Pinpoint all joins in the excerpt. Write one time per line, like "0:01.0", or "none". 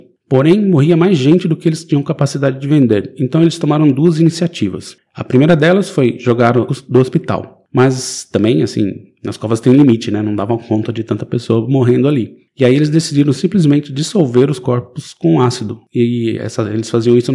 0:06.7